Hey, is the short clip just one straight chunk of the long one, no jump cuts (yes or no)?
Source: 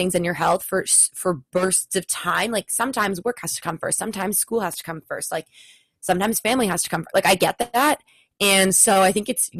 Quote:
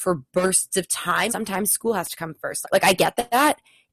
no